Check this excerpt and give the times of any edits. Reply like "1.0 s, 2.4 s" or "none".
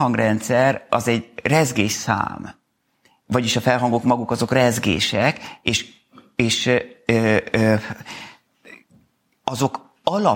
none